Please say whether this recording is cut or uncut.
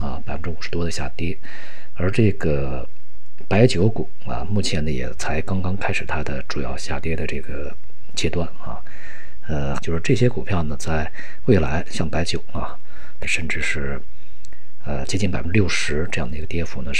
cut